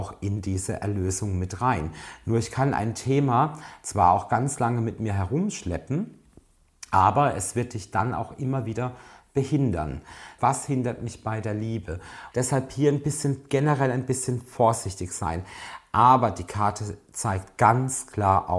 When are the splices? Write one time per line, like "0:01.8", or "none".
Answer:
0:10.4
0:12.3